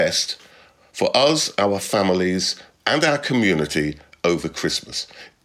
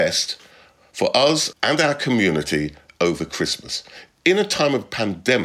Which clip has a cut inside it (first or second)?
second